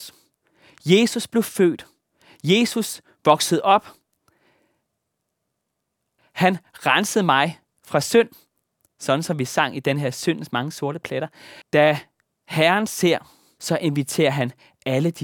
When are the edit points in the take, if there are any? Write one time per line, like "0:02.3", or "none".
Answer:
0:06.2
0:11.6
0:13.6